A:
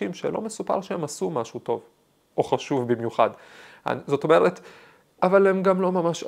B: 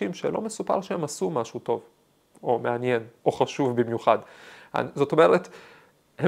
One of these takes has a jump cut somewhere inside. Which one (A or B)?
A